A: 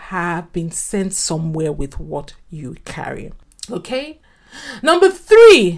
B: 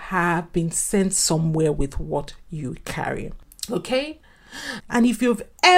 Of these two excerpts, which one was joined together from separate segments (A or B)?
B